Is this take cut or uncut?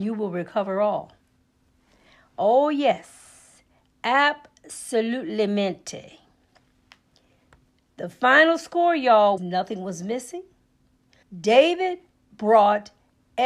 cut